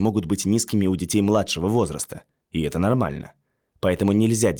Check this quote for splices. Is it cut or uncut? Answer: uncut